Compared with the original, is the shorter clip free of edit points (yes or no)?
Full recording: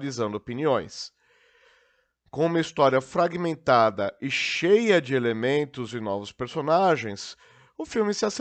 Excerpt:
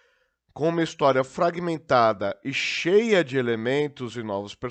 yes